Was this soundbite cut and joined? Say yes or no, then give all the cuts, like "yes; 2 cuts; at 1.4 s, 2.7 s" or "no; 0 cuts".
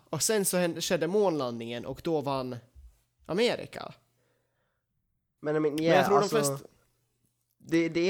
yes; 1 cut; at 5.4 s